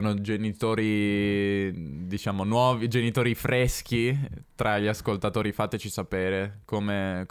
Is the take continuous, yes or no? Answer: yes